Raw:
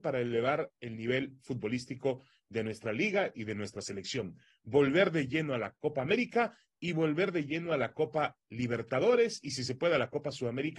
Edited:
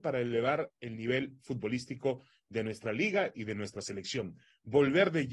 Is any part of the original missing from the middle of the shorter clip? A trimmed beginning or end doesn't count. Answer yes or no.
no